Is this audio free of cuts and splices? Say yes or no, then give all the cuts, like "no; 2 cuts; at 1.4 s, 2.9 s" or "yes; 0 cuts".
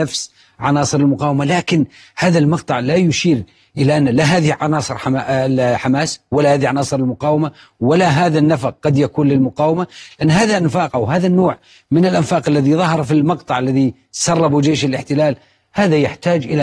yes; 0 cuts